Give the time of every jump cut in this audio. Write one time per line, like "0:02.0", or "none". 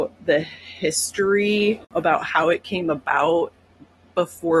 0:01.8